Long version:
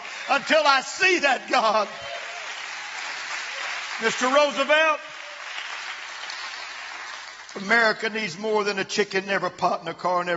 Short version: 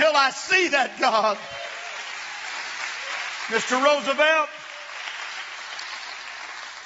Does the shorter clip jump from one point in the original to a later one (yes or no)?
no